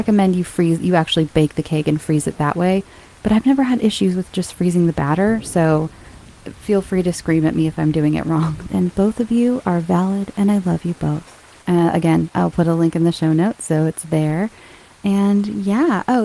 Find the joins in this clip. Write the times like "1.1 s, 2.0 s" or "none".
8.7 s, 11.6 s